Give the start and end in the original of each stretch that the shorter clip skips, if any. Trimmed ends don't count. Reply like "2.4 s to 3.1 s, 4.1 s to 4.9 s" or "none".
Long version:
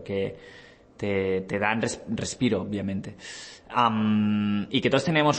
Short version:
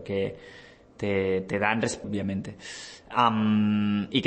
2.0 s to 2.6 s